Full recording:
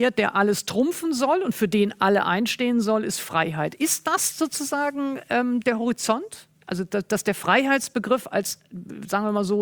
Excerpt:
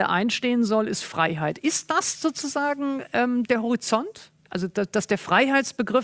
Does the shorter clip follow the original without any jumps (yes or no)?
yes